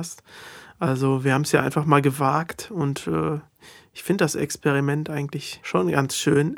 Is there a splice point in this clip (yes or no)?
no